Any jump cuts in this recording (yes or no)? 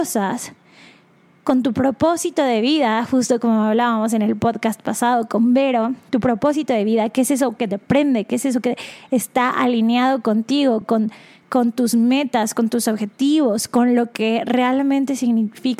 no